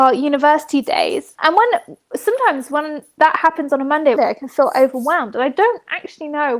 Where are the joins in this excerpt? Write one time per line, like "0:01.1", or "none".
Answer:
0:01.3
0:04.2